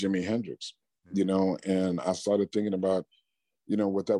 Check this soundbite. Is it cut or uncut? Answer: uncut